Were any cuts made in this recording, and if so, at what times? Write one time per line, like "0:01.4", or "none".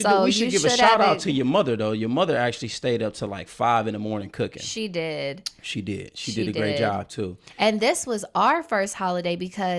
none